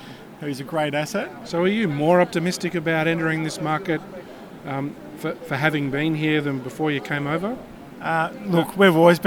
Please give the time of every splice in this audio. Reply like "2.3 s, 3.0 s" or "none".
1.4 s